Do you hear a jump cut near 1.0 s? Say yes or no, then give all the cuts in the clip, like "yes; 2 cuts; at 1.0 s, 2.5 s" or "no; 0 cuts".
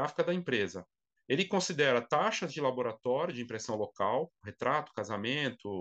no; 1 cut; at 4.4 s